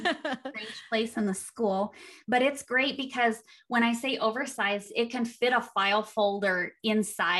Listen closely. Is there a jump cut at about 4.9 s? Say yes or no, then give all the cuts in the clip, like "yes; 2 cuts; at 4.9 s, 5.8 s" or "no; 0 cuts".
no; 0 cuts